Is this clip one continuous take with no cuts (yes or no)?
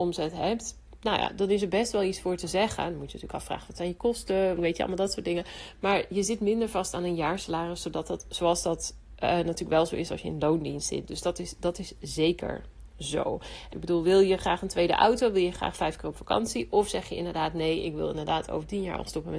no